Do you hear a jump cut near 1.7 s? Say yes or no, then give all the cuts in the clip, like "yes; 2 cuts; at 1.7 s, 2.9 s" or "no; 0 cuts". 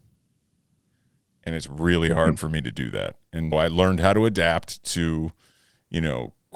no; 1 cut; at 3.5 s